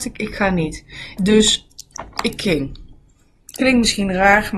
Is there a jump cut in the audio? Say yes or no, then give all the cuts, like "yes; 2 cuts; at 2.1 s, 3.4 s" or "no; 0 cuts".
yes; 1 cut; at 1.2 s